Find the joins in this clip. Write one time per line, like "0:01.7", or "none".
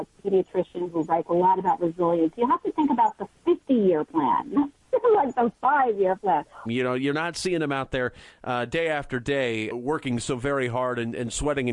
0:06.7
0:09.7

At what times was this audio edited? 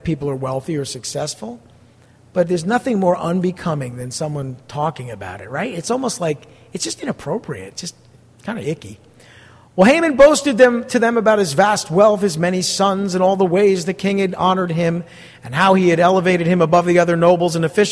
none

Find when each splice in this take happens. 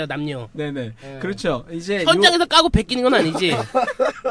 none

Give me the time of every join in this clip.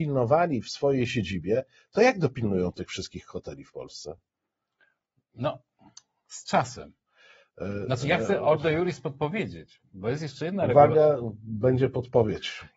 none

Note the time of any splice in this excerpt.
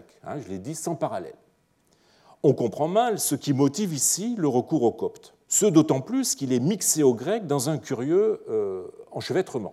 0:05.4

